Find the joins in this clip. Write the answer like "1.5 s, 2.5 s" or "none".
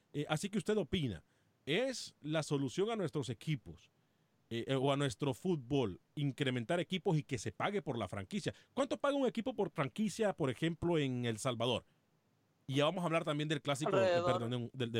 6.1 s